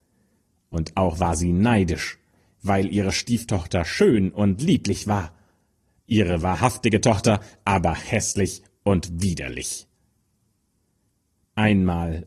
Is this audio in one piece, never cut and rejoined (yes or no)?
yes